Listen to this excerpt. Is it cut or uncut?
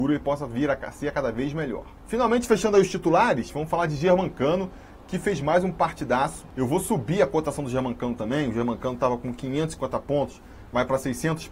uncut